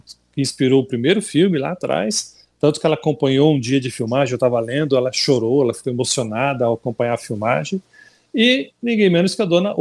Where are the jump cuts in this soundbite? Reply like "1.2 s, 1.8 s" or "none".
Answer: none

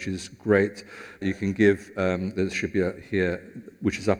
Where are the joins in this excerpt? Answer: 1.2 s, 3.0 s

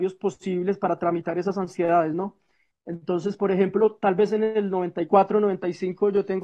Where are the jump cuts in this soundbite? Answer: none

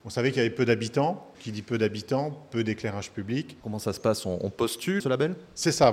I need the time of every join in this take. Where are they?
1.3 s, 3.6 s, 5.0 s

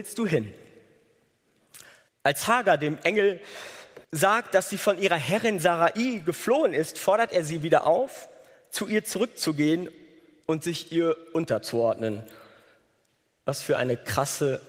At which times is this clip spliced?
2.1 s, 4.0 s

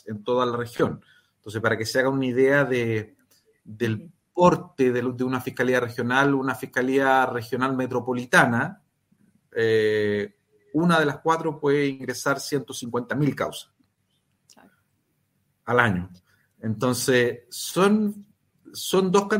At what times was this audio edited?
none

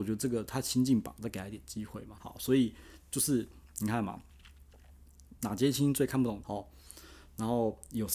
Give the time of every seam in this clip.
2.2 s, 5.4 s, 6.4 s

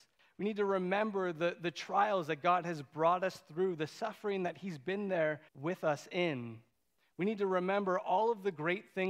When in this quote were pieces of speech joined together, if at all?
5.5 s

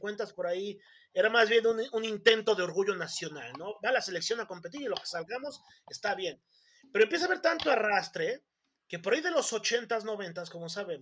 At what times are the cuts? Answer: none

